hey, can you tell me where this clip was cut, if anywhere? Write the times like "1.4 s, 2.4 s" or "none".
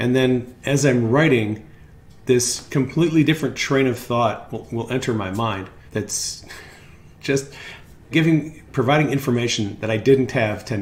5.9 s, 8.1 s